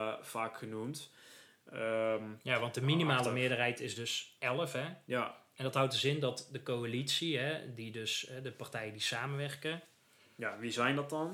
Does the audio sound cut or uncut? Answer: uncut